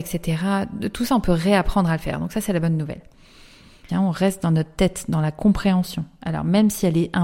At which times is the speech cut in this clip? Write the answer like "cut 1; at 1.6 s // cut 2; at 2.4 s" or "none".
cut 1; at 3.9 s

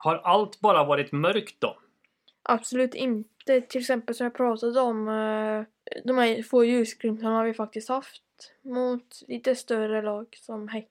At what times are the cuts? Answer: none

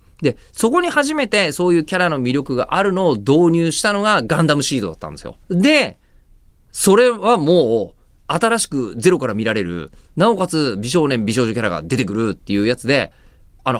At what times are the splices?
cut 1; at 5.4 s

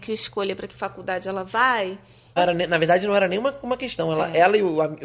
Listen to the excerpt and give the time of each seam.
cut 1; at 2.4 s

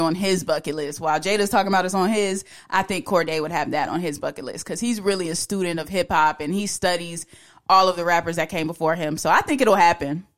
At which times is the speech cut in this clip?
none

